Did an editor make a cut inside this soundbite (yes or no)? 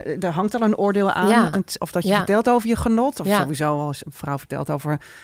yes